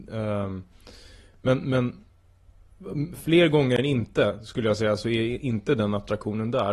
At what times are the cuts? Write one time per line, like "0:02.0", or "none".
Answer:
none